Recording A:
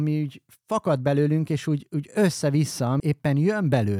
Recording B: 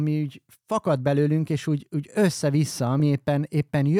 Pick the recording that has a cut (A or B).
A